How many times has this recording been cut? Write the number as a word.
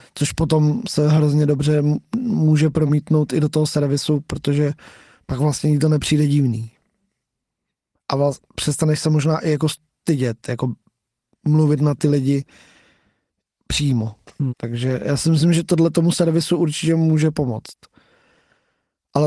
one